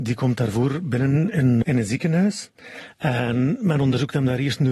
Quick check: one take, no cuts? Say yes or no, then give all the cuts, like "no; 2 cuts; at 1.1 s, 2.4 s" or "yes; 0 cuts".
no; 1 cut; at 1.6 s